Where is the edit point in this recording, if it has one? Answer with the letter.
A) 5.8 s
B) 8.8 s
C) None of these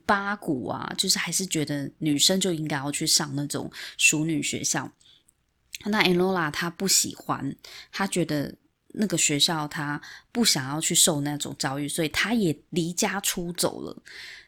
C